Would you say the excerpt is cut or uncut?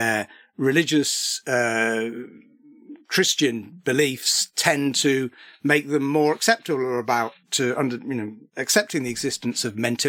uncut